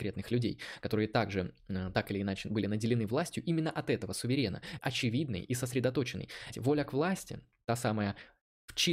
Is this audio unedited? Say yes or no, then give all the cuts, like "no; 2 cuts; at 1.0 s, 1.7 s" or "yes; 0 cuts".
no; 2 cuts; at 4.8 s, 6.5 s